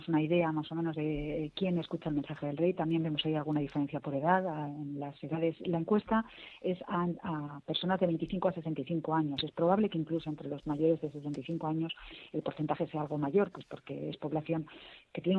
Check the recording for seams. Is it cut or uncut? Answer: uncut